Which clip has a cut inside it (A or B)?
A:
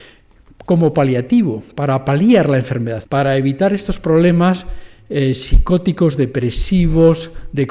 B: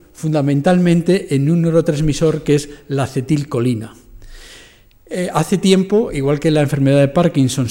A